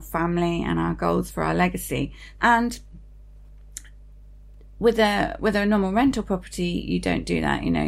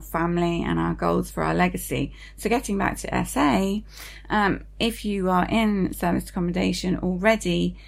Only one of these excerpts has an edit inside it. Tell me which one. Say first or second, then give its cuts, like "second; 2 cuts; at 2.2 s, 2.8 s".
first; 1 cut; at 2.3 s